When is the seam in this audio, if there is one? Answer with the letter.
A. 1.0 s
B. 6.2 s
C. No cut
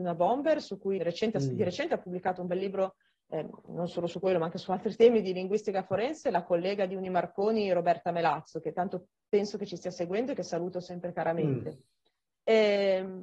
A